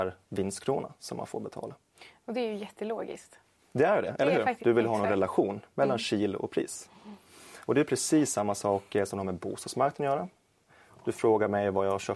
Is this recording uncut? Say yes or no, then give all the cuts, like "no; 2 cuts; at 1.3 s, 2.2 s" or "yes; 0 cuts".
no; 1 cut; at 4.6 s